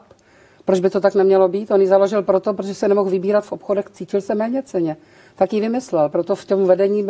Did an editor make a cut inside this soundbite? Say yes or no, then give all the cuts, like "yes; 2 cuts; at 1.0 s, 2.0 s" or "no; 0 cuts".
no; 0 cuts